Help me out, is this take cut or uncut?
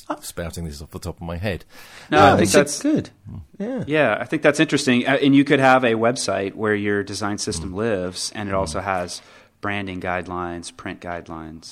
uncut